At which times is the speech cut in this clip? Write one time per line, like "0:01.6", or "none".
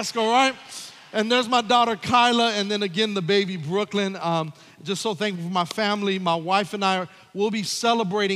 none